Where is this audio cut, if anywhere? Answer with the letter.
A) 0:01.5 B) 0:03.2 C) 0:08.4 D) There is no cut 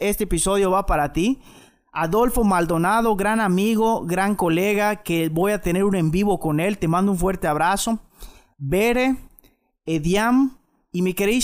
D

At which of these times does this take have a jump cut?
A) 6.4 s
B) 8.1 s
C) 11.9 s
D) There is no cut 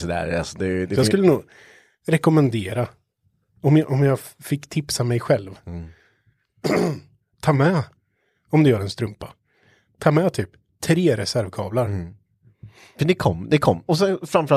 D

